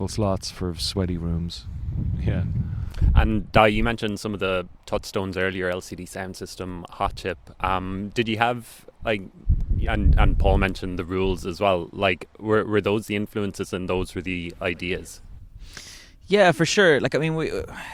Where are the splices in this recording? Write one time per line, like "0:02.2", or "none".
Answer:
none

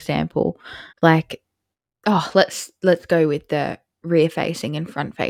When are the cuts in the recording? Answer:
0:00.9

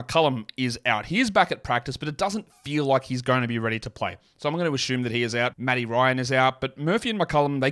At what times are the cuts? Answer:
0:05.5

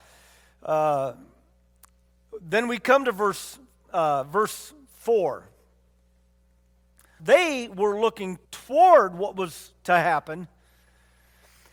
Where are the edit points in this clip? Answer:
0:07.2
0:08.4

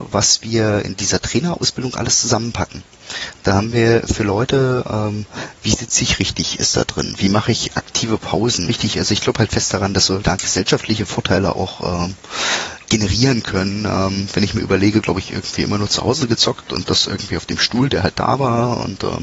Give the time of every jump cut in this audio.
0:08.7
0:10.2
0:15.0

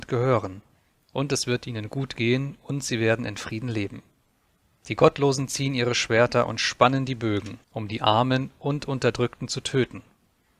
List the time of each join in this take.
0:04.8
0:07.6

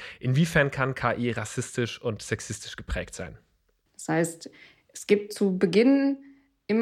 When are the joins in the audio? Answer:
0:03.9

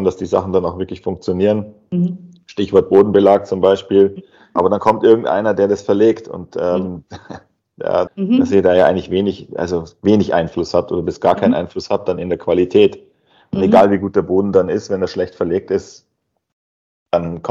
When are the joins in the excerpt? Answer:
0:04.6
0:08.1

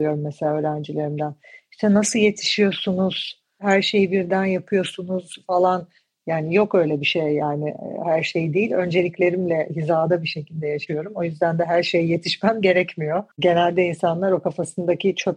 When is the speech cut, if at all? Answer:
0:13.3

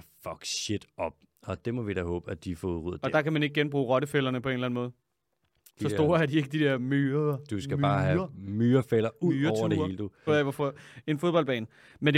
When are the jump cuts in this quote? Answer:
0:05.7
0:10.3

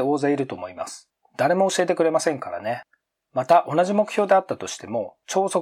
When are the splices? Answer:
none

